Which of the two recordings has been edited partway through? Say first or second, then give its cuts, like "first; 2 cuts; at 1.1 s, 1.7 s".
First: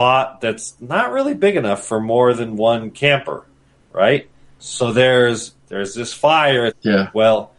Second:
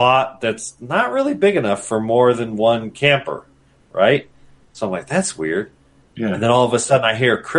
first; 2 cuts; at 4.6 s, 6.7 s